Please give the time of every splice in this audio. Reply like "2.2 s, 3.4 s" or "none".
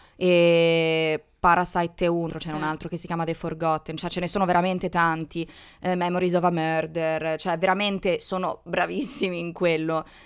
2.3 s